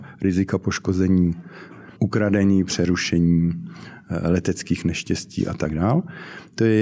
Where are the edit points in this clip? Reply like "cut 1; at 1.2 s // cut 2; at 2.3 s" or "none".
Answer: cut 1; at 2.0 s